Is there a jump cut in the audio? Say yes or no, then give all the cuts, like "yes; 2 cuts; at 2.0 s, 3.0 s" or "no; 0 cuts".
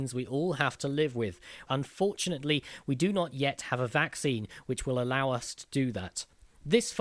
yes; 1 cut; at 1.7 s